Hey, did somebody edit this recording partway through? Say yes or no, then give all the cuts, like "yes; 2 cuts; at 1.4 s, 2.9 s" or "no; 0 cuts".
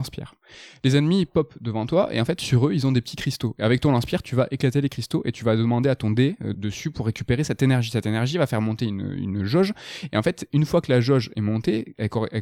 yes; 1 cut; at 6.5 s